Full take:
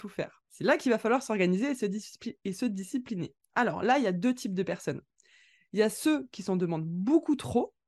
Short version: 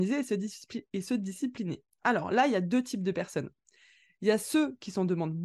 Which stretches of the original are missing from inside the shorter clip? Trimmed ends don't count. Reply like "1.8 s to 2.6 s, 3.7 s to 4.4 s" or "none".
none